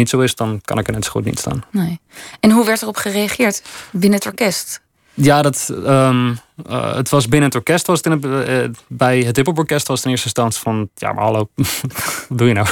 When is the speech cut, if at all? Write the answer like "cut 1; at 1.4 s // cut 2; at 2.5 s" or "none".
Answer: none